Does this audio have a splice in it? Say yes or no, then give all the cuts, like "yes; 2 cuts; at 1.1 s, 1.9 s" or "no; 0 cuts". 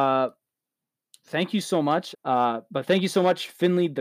yes; 1 cut; at 2.1 s